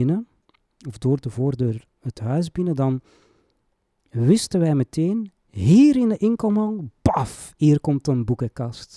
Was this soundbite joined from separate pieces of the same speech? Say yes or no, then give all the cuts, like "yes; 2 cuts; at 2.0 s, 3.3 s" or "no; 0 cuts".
no; 0 cuts